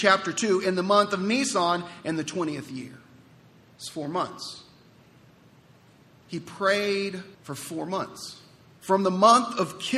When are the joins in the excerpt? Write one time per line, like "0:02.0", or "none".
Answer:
0:07.3
0:08.8